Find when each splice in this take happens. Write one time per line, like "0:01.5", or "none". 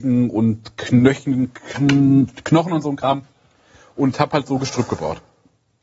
none